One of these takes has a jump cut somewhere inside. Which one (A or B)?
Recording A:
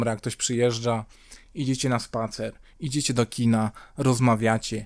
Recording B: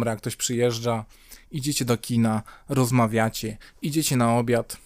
B